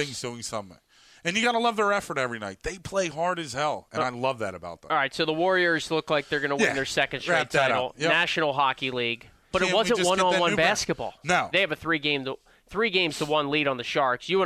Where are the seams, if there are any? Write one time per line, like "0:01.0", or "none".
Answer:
0:09.5
0:11.5